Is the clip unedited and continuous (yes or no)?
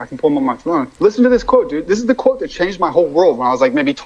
no